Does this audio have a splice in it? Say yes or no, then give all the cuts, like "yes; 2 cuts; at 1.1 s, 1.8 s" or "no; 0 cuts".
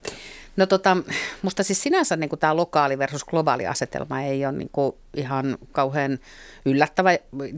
no; 0 cuts